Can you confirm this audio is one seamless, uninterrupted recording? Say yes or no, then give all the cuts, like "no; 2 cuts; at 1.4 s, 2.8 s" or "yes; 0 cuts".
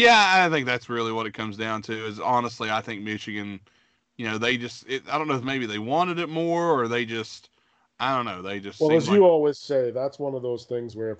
yes; 0 cuts